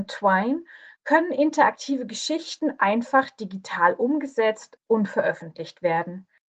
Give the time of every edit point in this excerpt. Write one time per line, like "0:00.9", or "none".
none